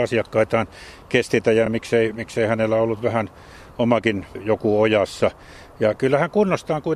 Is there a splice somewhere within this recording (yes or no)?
no